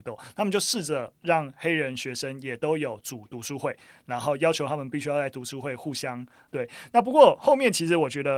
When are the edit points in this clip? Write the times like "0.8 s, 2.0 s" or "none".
6.5 s